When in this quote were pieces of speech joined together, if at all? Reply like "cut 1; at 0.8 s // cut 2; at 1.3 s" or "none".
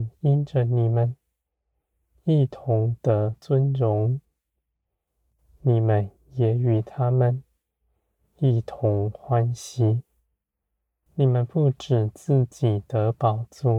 cut 1; at 11.1 s